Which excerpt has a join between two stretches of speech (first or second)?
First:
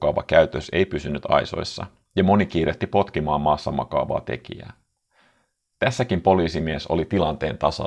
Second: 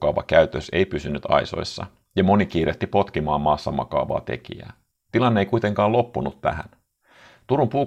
second